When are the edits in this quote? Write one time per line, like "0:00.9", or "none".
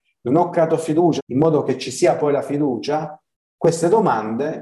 0:01.2